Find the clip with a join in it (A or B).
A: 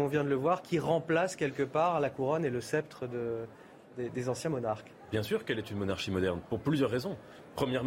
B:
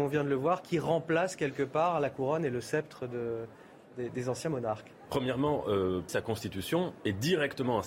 B